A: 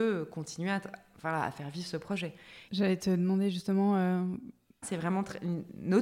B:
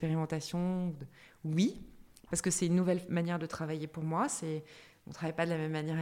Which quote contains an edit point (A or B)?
A